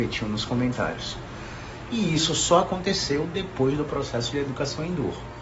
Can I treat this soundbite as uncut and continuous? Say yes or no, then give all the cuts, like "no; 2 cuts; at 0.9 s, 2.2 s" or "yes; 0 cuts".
no; 1 cut; at 1.9 s